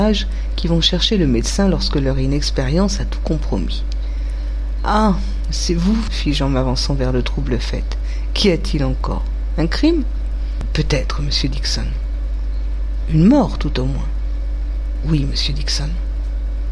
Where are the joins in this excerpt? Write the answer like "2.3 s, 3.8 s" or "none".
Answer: 6.1 s